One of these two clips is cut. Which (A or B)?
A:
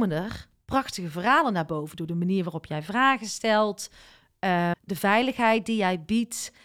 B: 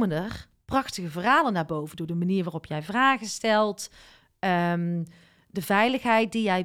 A